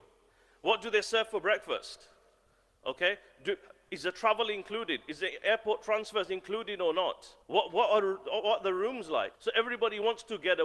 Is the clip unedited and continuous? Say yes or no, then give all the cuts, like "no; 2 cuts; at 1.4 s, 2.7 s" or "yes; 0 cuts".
no; 2 cuts; at 7.4 s, 9.3 s